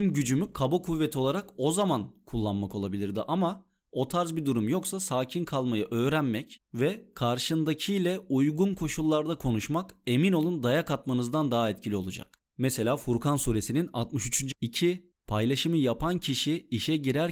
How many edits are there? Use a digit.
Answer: 1